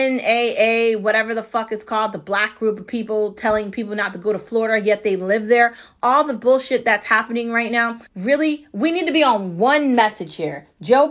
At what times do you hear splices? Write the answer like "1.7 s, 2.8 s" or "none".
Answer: 8.1 s